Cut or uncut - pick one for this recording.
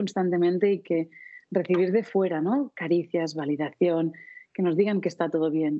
uncut